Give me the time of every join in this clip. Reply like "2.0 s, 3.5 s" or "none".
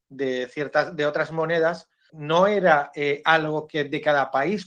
2.1 s